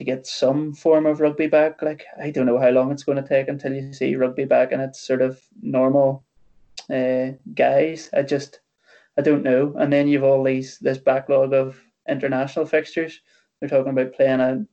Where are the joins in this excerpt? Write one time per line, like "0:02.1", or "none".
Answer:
none

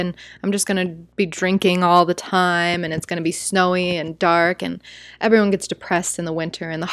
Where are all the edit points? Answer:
none

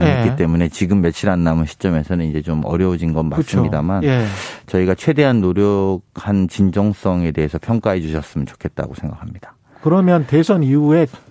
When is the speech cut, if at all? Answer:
none

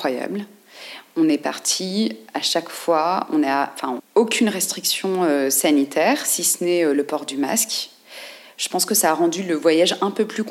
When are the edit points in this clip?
0:04.0

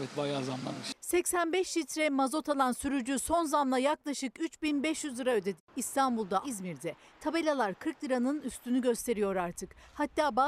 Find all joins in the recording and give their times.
0:06.4

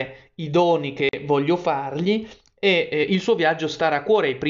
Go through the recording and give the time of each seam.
none

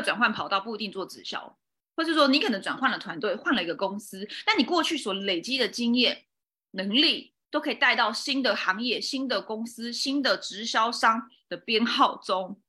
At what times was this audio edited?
none

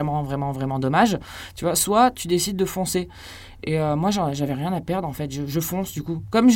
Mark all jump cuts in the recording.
none

